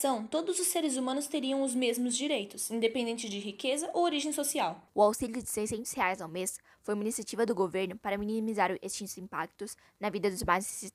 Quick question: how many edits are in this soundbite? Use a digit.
1